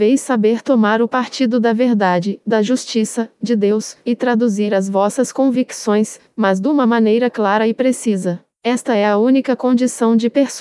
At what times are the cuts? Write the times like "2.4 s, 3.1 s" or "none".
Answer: none